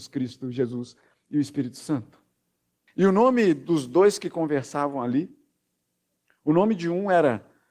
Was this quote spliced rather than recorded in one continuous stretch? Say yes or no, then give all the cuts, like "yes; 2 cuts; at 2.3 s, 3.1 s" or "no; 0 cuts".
yes; 1 cut; at 2.9 s